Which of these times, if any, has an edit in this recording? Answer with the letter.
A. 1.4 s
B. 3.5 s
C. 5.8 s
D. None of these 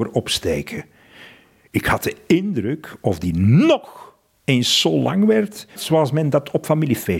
C